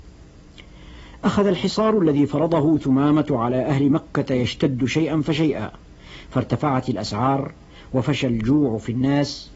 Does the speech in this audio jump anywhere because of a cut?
no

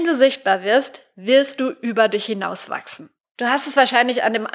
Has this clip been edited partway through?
yes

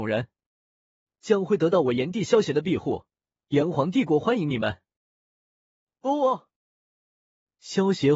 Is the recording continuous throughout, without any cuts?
yes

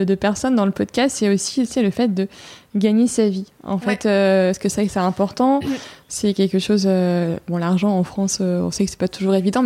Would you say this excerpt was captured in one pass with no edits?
yes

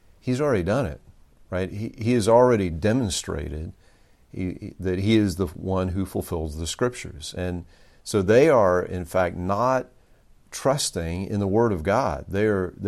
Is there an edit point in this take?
no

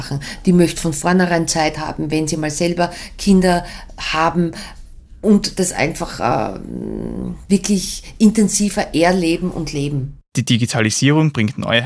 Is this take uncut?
yes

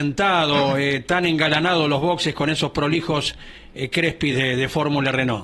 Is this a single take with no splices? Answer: yes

